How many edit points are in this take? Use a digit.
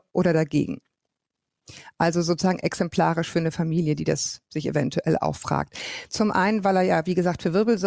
1